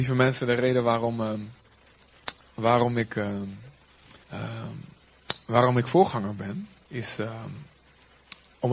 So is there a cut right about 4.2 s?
yes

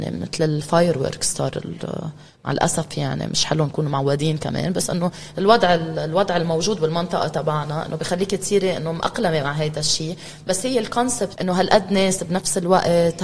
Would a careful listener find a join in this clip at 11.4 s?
yes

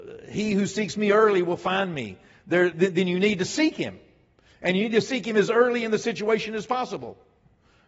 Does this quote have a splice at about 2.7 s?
yes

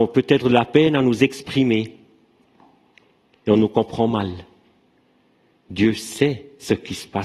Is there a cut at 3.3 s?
yes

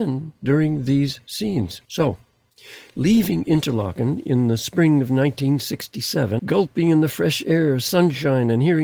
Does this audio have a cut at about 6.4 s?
yes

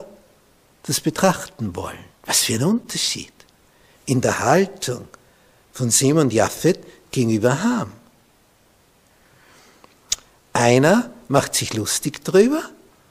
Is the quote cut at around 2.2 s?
yes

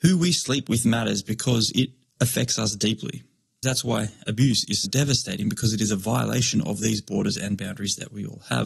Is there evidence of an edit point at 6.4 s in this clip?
no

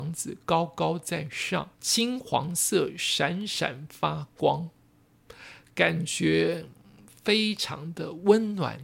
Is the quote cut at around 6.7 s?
no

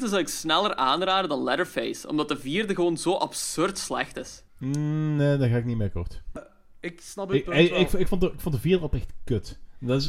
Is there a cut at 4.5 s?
yes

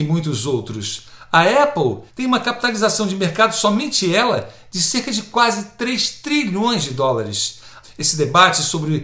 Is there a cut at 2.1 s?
yes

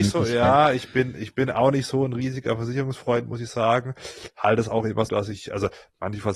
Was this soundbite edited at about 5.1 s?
yes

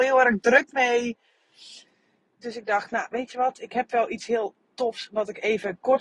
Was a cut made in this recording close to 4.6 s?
yes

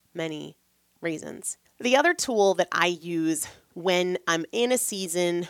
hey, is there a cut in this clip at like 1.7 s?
yes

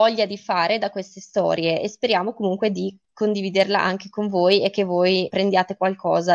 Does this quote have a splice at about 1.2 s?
no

